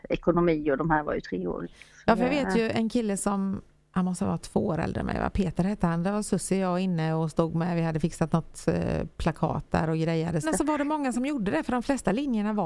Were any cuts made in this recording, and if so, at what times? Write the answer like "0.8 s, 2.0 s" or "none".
1.6 s, 10.4 s